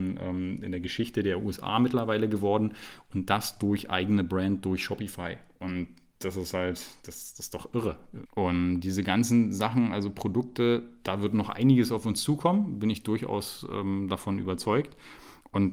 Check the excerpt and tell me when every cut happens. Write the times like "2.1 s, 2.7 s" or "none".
8.3 s